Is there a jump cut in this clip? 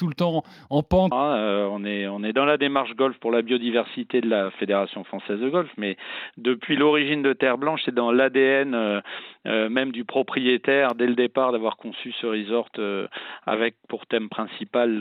yes; 1 cut; at 1.1 s

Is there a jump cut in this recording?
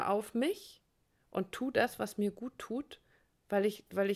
no; 0 cuts

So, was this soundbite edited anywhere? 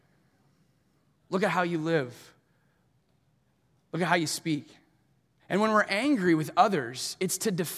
yes; 1 cut; at 5.4 s

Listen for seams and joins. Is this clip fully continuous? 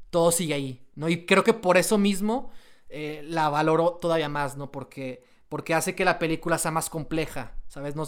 yes; 0 cuts

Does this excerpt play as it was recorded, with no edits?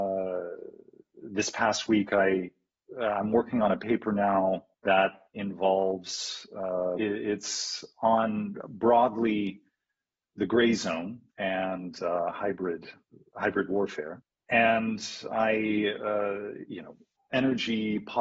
no; 3 cuts; at 4.7 s, 7.0 s, 11.3 s

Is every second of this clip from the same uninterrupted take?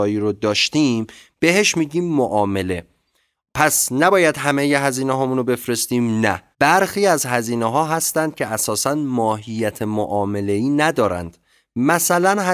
no; 1 cut; at 6.5 s

